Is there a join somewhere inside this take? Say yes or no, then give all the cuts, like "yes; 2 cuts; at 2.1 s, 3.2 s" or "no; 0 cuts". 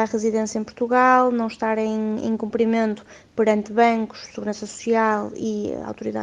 no; 0 cuts